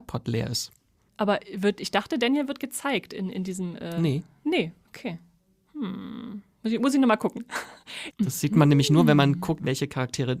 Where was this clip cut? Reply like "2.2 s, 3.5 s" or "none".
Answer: 1.1 s, 8.1 s